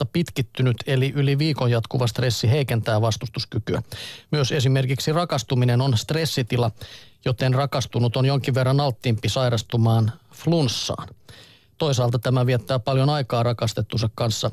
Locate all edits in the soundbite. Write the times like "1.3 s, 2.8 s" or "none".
none